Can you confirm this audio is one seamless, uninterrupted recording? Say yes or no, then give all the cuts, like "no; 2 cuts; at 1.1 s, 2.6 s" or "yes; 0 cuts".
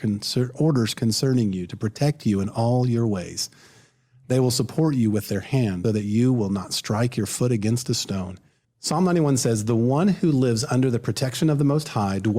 no; 2 cuts; at 5.8 s, 8.6 s